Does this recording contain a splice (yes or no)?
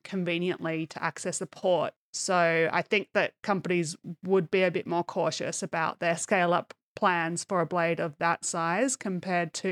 yes